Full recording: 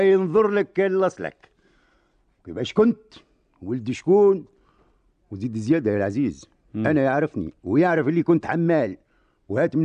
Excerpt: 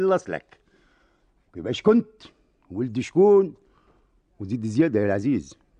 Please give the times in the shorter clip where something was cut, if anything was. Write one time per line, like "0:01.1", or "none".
none